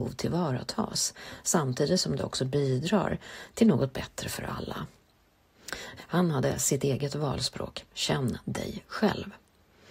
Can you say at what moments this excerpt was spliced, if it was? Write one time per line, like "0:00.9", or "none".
0:06.0